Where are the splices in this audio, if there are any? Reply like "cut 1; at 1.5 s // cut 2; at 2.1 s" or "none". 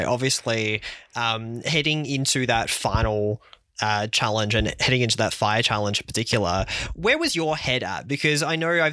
none